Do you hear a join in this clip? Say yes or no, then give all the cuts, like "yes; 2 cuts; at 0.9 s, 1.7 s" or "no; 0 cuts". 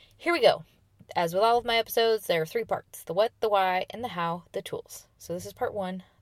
no; 0 cuts